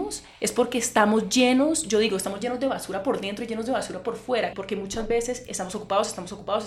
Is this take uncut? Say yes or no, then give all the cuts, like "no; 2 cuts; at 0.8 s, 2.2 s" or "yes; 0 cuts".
no; 1 cut; at 4.5 s